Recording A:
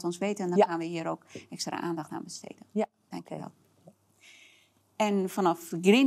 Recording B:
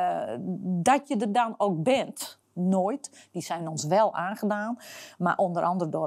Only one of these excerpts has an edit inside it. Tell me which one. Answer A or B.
B